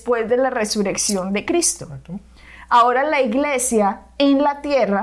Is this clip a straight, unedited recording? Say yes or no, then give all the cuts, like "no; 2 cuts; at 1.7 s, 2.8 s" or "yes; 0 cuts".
yes; 0 cuts